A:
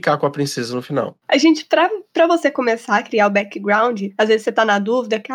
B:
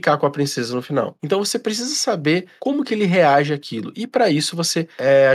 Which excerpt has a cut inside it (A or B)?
B